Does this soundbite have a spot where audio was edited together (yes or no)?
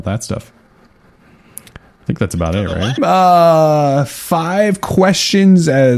yes